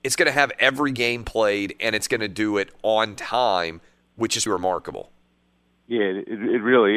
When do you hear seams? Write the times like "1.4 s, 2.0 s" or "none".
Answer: 4.5 s